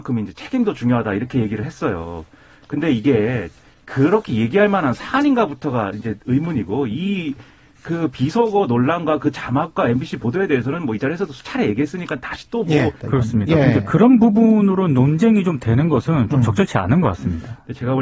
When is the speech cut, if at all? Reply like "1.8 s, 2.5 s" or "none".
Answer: 13.0 s